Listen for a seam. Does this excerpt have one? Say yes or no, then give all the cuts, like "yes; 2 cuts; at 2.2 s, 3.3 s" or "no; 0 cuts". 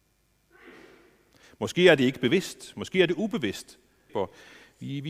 yes; 1 cut; at 4.1 s